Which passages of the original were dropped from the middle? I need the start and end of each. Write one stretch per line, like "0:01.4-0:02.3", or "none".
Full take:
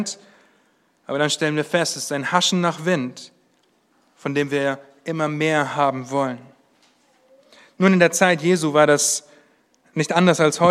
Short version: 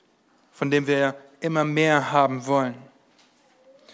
none